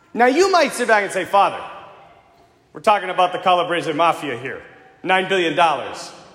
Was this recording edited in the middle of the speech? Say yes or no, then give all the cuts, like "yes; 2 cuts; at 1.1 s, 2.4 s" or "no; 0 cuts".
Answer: no; 0 cuts